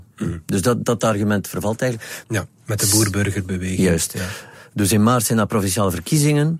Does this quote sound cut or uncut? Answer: cut